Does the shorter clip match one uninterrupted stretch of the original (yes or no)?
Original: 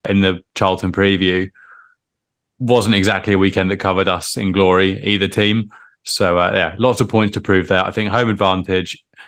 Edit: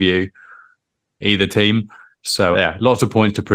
no